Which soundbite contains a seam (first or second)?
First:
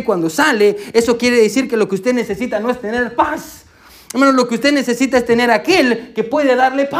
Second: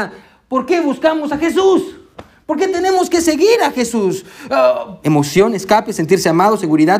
second